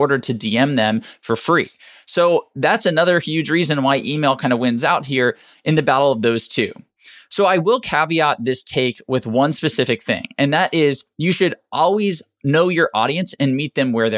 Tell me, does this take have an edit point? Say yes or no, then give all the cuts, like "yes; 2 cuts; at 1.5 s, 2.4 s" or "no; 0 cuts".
no; 0 cuts